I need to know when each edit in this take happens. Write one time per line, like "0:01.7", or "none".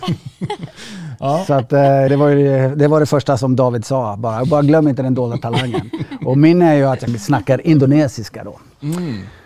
0:02.1